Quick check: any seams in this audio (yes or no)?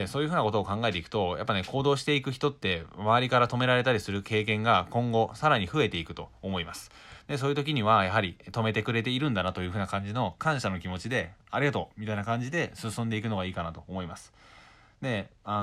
no